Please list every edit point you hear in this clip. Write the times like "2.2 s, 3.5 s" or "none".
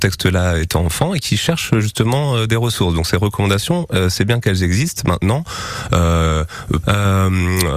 6.8 s